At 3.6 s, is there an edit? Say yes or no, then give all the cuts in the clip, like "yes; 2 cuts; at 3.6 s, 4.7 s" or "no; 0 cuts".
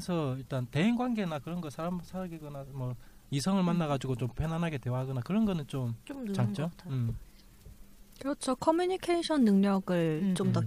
no; 1 cut; at 6.0 s